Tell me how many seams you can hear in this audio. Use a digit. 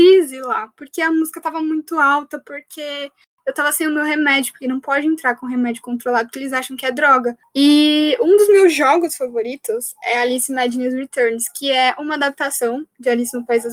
1